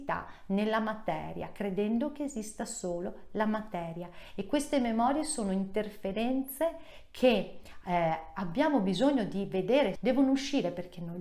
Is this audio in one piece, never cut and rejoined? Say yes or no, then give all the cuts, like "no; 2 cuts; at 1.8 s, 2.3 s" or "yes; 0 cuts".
no; 1 cut; at 9.9 s